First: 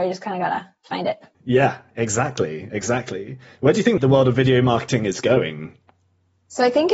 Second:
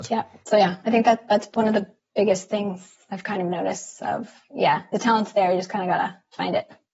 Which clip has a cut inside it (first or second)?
first